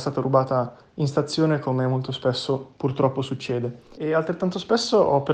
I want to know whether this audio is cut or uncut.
cut